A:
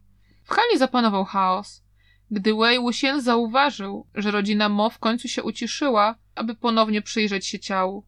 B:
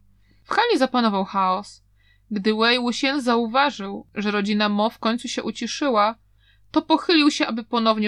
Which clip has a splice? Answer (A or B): A